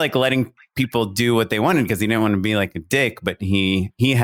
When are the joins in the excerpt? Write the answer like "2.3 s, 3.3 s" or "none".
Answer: none